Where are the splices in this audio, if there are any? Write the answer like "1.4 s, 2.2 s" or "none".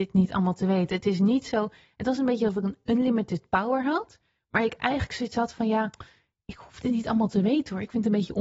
none